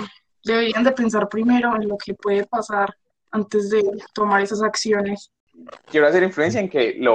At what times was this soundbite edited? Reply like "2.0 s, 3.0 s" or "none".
5.8 s

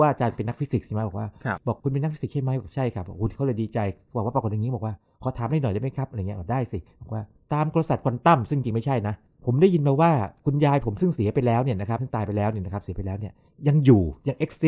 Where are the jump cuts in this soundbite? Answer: none

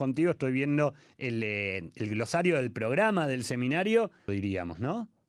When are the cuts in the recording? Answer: 4.3 s

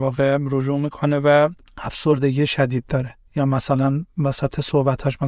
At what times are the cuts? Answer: none

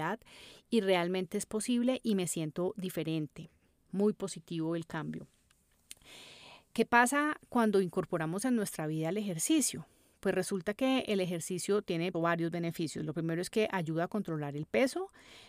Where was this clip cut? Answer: 12.1 s

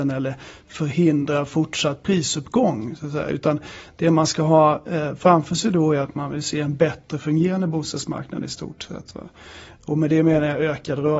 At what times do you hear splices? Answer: none

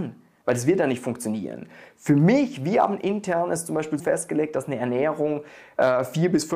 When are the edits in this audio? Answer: 4.0 s

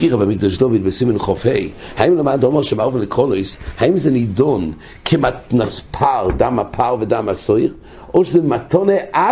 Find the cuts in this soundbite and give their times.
none

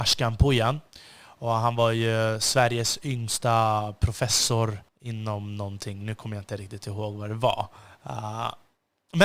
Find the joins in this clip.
4.9 s

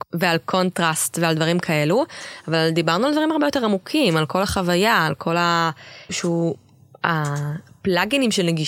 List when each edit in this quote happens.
6.1 s

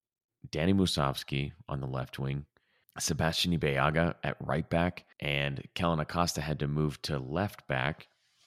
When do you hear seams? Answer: 2.8 s, 5.1 s

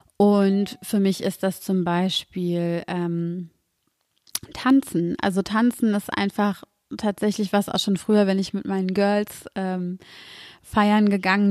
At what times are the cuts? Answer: none

